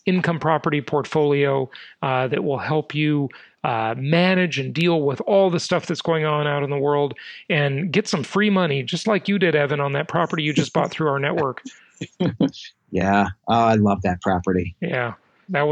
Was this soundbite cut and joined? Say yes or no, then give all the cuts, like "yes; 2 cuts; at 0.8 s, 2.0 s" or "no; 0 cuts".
no; 0 cuts